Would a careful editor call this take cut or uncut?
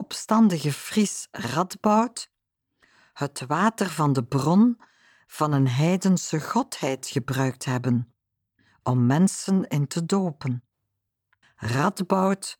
cut